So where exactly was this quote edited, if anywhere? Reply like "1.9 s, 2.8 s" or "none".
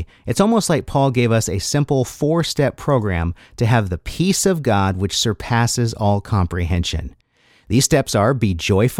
none